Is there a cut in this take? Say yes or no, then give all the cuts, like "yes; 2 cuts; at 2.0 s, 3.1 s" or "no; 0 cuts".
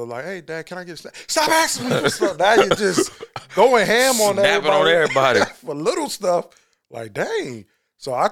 no; 0 cuts